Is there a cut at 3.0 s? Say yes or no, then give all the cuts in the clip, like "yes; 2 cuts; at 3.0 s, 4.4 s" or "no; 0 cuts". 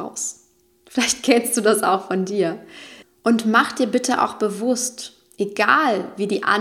yes; 1 cut; at 3.0 s